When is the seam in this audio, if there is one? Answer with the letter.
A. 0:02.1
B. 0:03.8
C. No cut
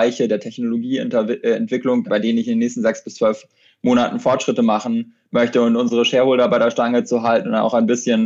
A